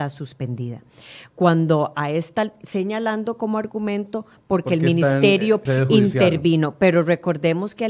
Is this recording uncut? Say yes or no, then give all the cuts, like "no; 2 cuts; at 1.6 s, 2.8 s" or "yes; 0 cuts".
no; 1 cut; at 5.7 s